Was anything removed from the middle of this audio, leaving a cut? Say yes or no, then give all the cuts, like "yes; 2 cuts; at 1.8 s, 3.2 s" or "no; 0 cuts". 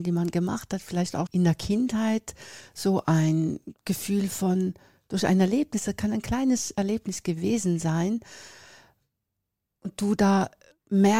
yes; 1 cut; at 1.3 s